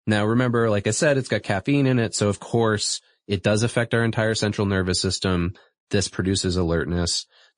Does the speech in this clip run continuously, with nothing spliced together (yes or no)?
yes